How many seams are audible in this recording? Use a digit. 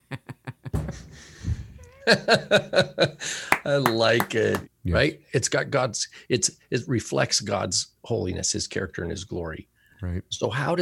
1